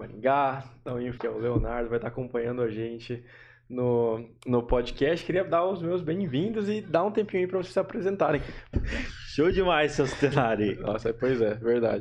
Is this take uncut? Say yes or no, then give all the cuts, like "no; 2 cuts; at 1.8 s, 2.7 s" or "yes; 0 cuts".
no; 2 cuts; at 1.2 s, 8.7 s